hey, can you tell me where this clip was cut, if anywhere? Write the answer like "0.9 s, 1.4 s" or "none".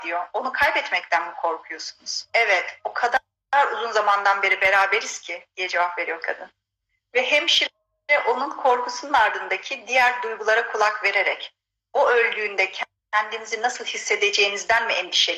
2.3 s